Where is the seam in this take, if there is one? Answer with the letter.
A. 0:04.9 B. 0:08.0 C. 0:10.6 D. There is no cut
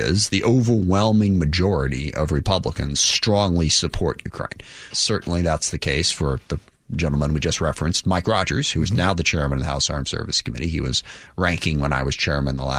A